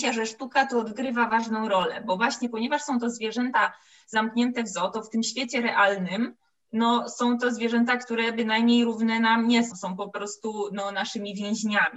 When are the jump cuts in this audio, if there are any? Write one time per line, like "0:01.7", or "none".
0:09.7